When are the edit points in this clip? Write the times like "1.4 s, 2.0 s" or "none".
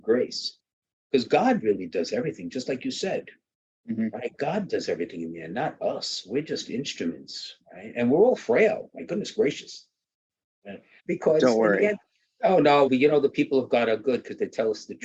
11.0 s, 12.9 s